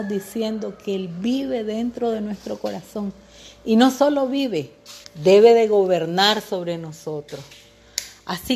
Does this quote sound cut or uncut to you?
cut